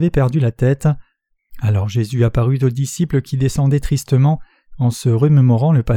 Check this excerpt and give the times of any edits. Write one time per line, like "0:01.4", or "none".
0:01.5